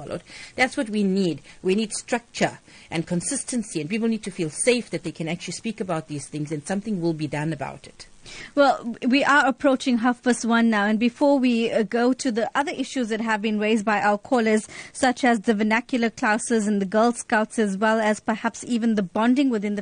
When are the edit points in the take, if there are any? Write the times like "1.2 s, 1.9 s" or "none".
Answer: none